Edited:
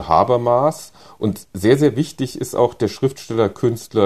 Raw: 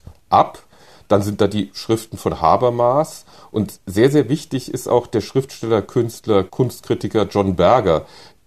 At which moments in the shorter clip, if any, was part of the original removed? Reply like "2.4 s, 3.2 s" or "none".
none